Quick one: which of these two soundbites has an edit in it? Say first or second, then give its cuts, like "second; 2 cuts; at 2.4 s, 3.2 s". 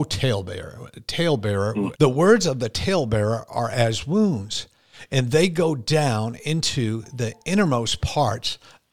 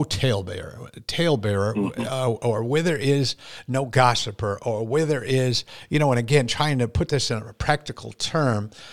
first; 1 cut; at 2.0 s